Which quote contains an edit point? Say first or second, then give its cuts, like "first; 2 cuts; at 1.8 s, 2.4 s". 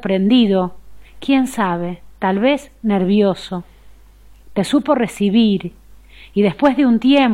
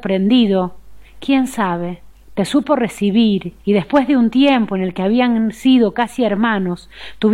second; 2 cuts; at 2.1 s, 3.6 s